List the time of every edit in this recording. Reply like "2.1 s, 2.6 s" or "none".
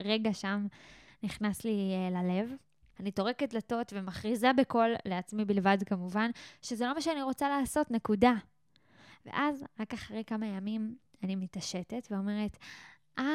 2.9 s